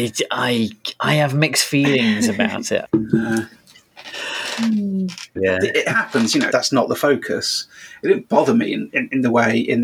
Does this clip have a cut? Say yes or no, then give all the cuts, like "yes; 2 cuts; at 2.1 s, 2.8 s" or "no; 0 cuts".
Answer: yes; 3 cuts; at 2.8 s, 5.4 s, 6.5 s